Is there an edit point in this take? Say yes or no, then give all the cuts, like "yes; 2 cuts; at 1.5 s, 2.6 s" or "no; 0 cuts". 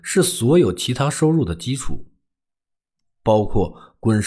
no; 0 cuts